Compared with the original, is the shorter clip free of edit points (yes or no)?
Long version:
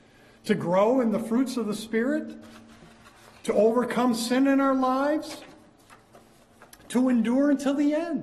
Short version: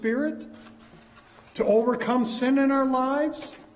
yes